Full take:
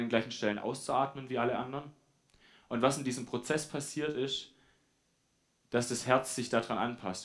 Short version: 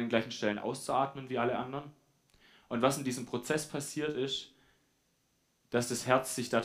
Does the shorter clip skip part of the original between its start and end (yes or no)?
no